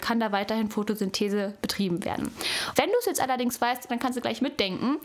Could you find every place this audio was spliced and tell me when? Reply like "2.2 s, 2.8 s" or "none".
2.7 s, 3.9 s